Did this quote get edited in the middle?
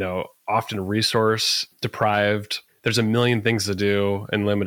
no; 0 cuts

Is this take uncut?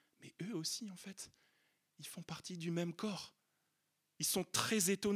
yes; 0 cuts

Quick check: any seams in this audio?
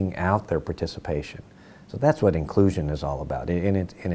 no; 0 cuts

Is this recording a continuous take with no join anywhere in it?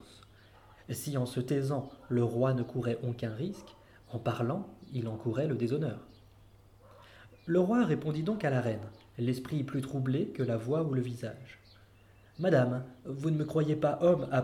yes; 0 cuts

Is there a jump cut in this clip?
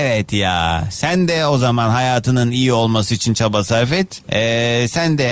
yes; 1 cut; at 4.2 s

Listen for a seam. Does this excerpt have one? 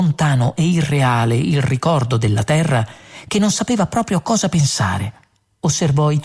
no; 0 cuts

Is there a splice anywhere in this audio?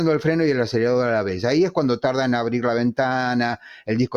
no; 0 cuts

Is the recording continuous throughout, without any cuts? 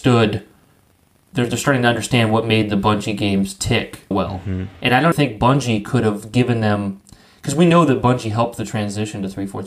no; 2 cuts; at 4.1 s, 5.1 s

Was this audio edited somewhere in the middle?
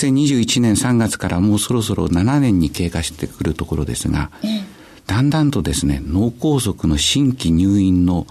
no; 0 cuts

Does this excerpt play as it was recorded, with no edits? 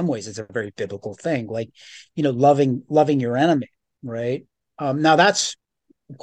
yes; 0 cuts

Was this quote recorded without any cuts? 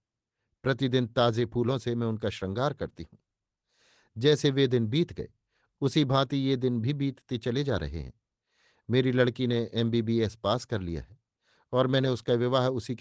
yes; 0 cuts

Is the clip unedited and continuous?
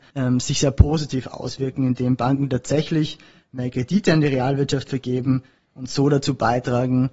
yes; 0 cuts

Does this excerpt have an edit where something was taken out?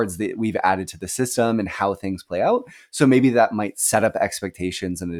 no; 0 cuts

